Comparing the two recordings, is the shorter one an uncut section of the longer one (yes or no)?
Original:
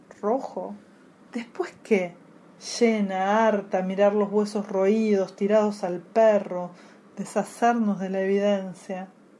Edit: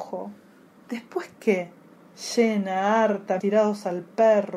no